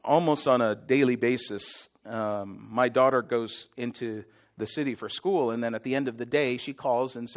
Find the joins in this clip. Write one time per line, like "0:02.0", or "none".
none